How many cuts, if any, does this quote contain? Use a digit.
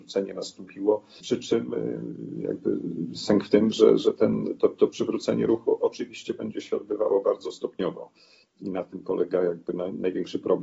1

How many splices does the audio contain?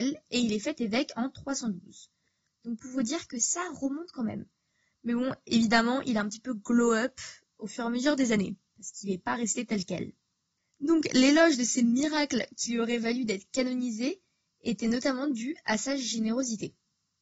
0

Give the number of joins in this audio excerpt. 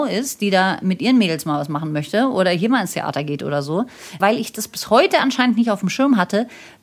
1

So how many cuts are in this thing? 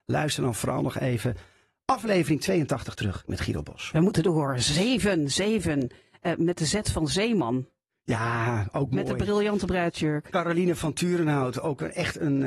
0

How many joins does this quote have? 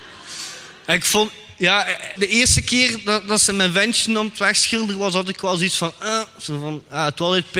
1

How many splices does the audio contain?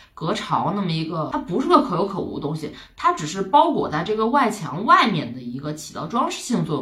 0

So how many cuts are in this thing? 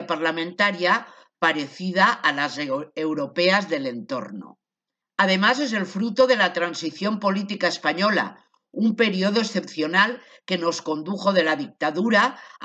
1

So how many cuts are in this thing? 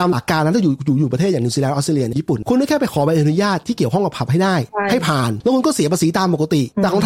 0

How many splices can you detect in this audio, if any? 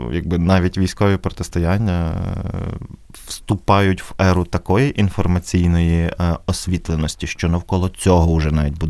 0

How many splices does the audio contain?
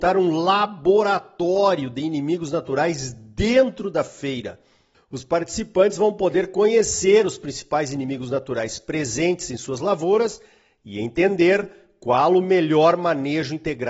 1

